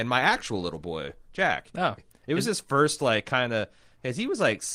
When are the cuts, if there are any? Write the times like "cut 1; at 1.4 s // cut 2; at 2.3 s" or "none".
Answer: cut 1; at 2.0 s